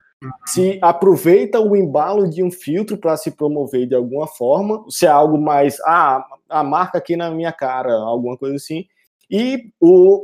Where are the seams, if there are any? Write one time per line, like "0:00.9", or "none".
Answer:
none